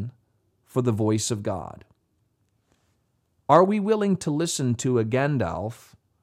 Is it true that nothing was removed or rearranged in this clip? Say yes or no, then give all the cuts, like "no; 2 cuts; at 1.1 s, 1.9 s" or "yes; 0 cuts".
yes; 0 cuts